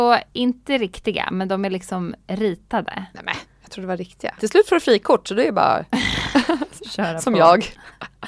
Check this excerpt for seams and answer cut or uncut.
cut